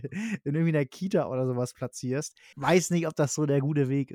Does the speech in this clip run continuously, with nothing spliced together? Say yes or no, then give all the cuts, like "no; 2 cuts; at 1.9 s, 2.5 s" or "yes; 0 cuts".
no; 1 cut; at 2.5 s